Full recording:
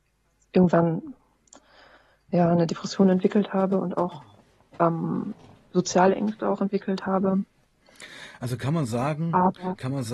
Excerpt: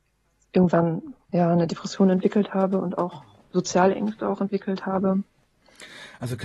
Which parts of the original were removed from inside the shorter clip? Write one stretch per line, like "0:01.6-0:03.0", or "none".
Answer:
0:01.2-0:02.2
0:04.4-0:05.6